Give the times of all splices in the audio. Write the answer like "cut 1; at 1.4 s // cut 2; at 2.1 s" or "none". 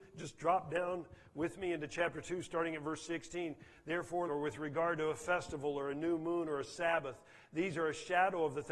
cut 1; at 4.3 s